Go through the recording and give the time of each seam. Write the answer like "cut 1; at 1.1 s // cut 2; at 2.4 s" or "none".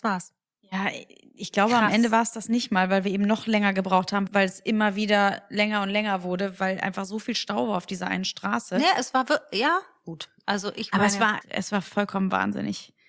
cut 1; at 4.3 s // cut 2; at 11.4 s